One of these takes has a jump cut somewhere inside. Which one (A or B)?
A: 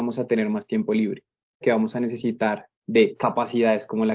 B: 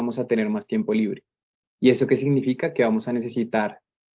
A